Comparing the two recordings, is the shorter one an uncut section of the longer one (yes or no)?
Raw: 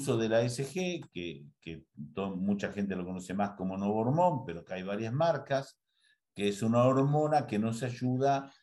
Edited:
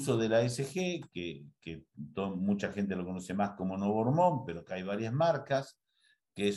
yes